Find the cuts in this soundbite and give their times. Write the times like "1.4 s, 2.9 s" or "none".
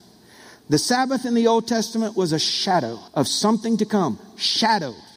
3.1 s